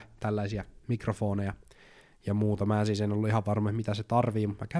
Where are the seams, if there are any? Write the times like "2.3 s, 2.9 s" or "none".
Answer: none